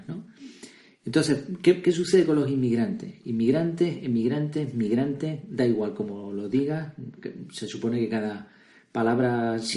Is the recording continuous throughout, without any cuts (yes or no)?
yes